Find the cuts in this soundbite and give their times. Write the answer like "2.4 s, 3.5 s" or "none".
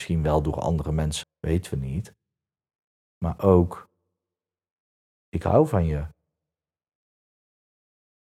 1.2 s